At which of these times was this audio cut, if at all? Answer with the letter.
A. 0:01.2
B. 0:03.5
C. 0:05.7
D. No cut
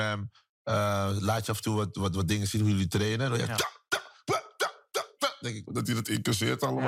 C